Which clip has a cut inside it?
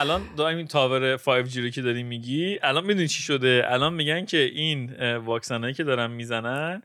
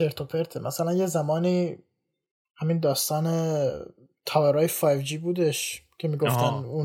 first; 1 cut; at 2.6 s

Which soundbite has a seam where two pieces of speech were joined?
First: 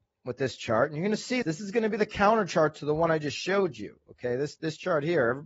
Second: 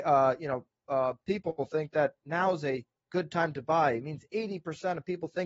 first; 1 cut; at 1.4 s

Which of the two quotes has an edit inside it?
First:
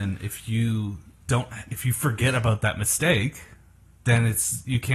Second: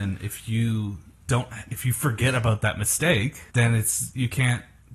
second; 1 cut; at 3.5 s

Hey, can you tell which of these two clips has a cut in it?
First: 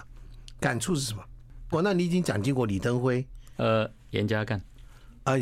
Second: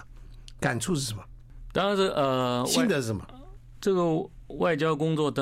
first; 1 cut; at 1.7 s

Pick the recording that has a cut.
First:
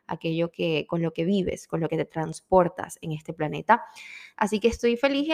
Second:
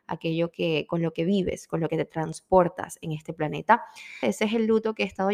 second; 1 cut; at 4.2 s

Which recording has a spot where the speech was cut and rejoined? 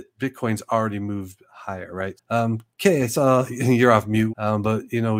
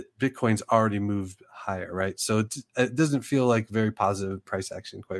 first; 2 cuts; at 2.2 s, 4.3 s

